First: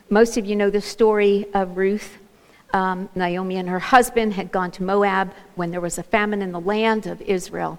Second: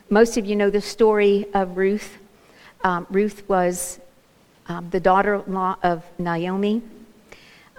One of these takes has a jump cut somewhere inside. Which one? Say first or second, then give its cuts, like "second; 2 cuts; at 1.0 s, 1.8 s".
first; 1 cut; at 2.5 s